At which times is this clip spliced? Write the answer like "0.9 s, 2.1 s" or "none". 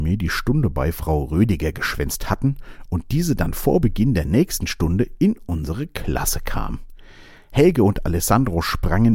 none